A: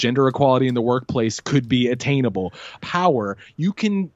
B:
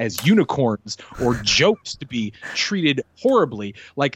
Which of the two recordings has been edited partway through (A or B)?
A